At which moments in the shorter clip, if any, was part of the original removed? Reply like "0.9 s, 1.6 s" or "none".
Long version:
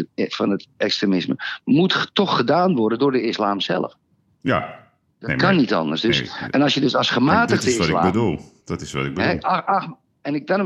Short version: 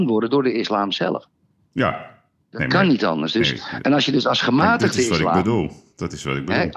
none